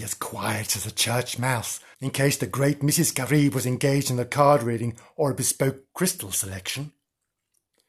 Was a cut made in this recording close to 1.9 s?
yes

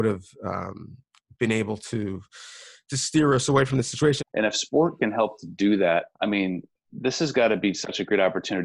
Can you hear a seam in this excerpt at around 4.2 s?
yes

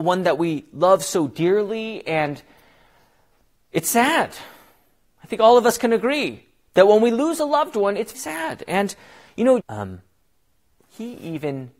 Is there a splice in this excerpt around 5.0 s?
no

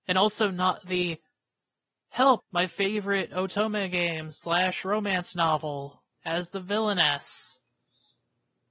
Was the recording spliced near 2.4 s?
yes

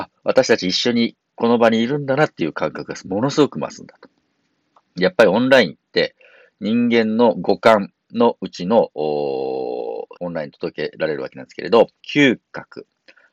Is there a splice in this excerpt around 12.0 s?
yes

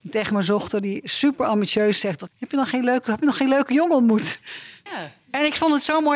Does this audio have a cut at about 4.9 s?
yes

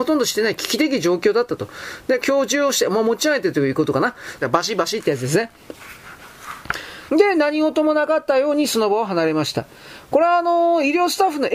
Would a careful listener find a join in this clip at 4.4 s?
yes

